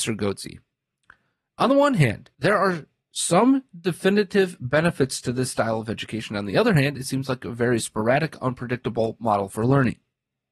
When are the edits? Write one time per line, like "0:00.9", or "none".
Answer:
0:02.3